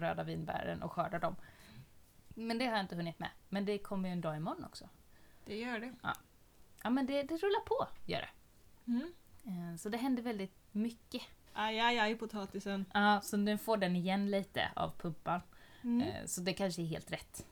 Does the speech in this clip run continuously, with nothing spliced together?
no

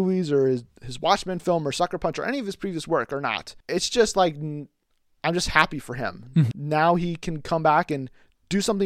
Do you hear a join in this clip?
yes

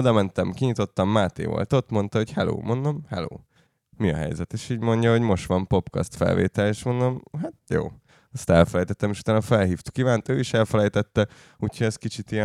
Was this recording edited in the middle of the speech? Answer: no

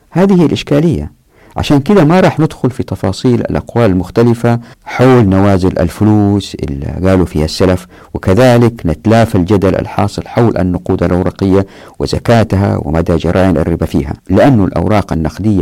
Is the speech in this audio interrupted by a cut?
yes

